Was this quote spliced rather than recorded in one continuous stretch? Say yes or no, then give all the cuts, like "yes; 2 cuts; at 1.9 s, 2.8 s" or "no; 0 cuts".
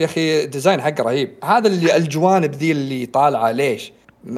no; 0 cuts